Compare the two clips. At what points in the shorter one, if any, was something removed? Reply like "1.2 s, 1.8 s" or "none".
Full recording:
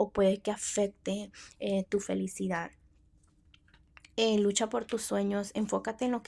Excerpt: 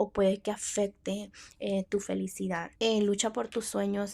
2.8 s